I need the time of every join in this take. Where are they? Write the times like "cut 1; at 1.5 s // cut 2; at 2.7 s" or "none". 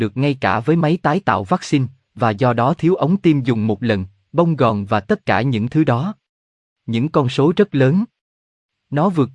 none